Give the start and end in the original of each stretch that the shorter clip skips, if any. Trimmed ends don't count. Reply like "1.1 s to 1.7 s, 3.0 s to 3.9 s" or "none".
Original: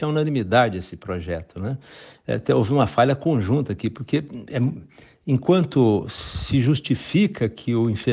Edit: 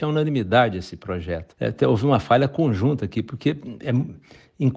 1.5 s to 2.2 s